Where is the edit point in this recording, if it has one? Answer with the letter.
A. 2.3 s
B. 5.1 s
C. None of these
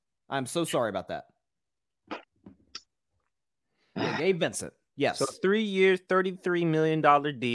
C